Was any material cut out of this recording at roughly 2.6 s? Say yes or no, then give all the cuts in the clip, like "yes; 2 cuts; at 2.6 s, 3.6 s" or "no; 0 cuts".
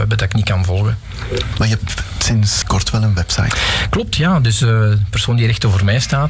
yes; 1 cut; at 2.6 s